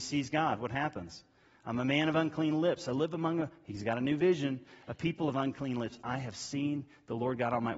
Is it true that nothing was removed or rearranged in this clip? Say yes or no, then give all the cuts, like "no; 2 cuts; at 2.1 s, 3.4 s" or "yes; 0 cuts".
yes; 0 cuts